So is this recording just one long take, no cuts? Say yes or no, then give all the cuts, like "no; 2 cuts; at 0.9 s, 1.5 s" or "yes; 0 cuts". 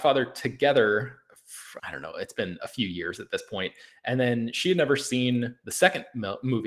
no; 1 cut; at 1.8 s